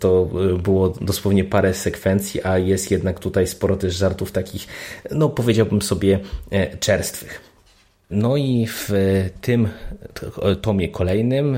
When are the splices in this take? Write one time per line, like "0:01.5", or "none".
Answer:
0:08.1